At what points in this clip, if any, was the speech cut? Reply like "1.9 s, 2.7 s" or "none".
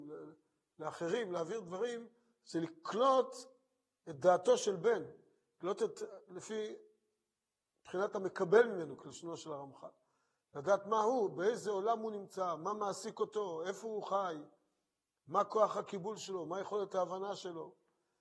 none